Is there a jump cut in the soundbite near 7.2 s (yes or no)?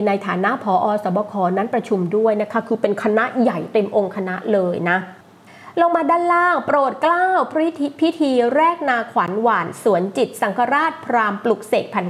no